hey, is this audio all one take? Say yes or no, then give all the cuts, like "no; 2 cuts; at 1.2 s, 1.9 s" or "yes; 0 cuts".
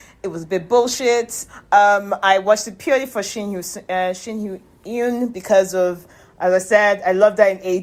no; 1 cut; at 1.5 s